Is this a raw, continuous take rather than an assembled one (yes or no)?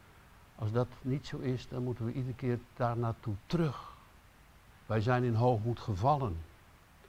no